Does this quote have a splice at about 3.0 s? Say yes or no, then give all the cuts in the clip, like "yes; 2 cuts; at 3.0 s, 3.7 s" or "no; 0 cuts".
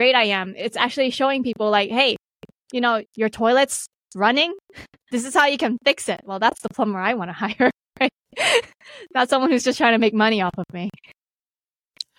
yes; 1 cut; at 3.0 s